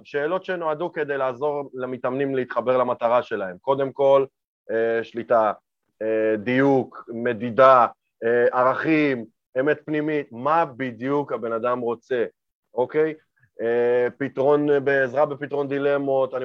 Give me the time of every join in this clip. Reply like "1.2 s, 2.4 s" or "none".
5.9 s